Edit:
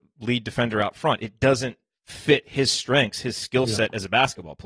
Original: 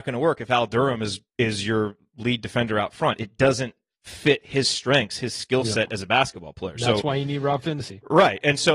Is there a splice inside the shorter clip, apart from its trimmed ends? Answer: no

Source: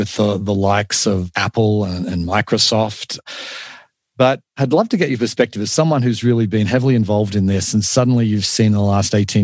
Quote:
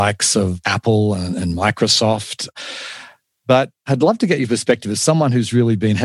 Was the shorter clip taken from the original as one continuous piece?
yes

